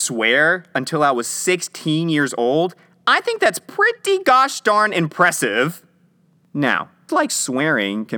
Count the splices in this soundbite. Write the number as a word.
one